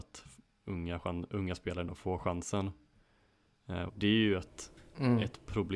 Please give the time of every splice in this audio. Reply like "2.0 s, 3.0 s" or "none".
3.9 s